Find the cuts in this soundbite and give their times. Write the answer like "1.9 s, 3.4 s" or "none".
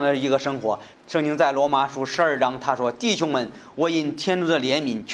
0.9 s